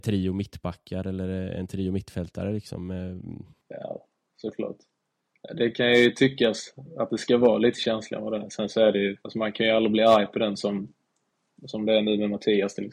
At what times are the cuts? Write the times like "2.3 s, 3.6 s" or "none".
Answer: 3.5 s, 9.2 s